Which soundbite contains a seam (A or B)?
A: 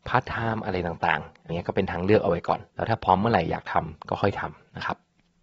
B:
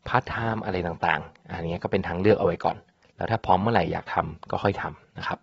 A